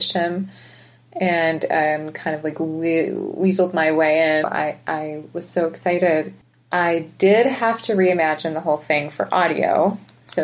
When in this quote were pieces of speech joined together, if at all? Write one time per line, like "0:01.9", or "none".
0:04.4